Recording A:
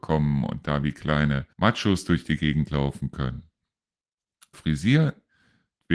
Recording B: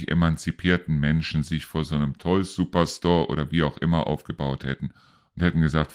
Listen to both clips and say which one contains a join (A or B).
A